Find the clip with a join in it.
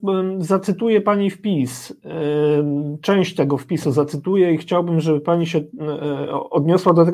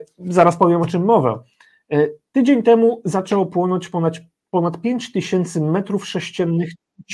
second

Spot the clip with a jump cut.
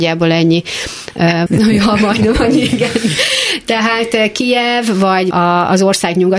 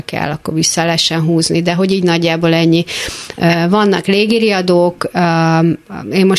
first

